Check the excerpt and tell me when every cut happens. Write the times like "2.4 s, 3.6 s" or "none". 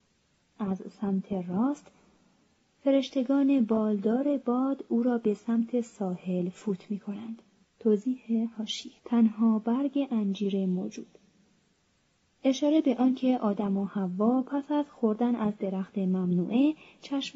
7.6 s, 9.0 s

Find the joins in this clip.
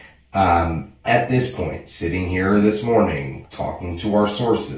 1.1 s, 3.4 s

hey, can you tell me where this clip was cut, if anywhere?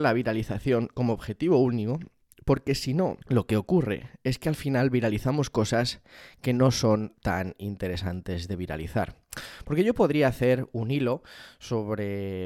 3.2 s

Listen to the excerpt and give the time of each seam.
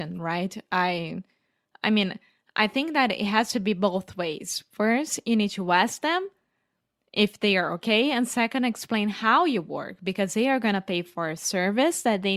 none

